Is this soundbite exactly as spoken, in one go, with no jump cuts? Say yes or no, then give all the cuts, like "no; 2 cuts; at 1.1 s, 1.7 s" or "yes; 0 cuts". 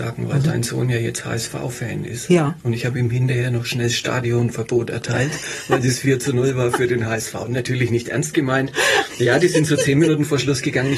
yes; 0 cuts